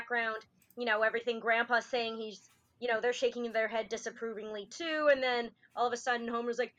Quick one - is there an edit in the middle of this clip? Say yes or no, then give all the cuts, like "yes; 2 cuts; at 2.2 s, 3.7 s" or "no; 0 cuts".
no; 0 cuts